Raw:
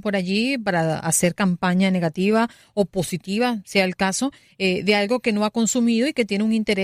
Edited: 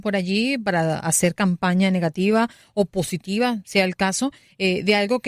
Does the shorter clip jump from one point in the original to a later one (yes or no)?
no